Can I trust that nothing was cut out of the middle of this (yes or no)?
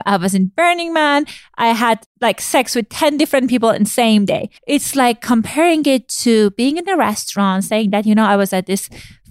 no